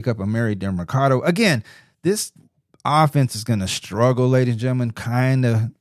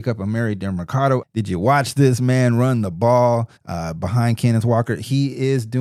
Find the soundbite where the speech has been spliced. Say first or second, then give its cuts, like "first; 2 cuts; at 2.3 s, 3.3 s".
second; 2 cuts; at 1.2 s, 3.6 s